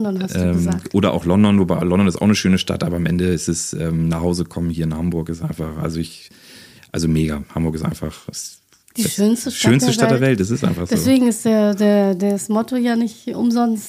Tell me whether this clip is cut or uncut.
uncut